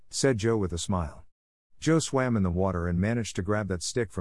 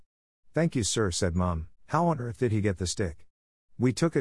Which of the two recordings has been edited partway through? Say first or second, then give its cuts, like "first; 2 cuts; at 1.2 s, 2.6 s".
second; 1 cut; at 1.8 s